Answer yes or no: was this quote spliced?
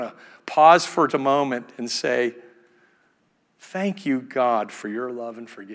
yes